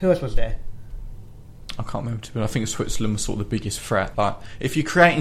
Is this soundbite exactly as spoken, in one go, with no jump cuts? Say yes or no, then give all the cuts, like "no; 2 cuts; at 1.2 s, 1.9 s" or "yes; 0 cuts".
no; 1 cut; at 4.1 s